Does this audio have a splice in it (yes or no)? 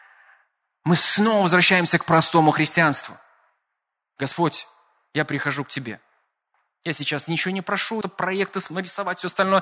yes